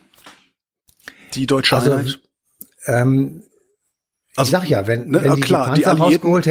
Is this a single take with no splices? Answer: yes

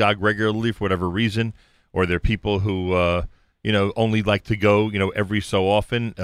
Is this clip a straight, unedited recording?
yes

